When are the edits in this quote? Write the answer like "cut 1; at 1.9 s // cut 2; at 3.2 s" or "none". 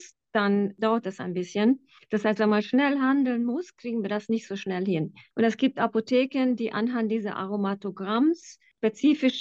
none